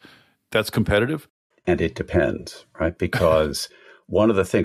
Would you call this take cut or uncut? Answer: cut